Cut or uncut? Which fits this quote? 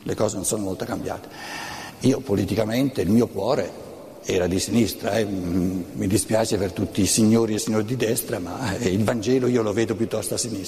uncut